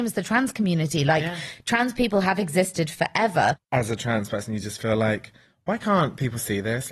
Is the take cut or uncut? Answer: uncut